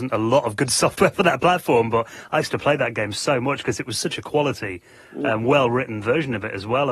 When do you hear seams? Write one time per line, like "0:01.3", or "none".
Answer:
none